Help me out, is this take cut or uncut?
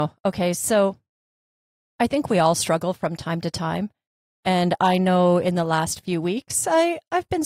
uncut